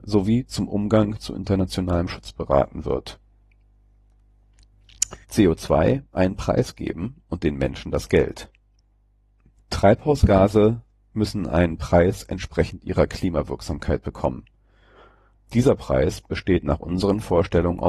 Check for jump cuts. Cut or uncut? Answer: cut